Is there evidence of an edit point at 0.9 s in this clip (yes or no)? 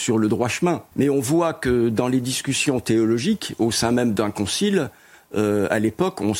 yes